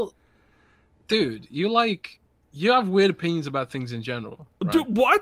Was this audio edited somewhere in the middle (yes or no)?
no